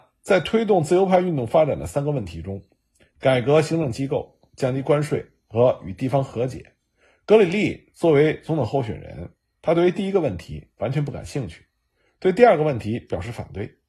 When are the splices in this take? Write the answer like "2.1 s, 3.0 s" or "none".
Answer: none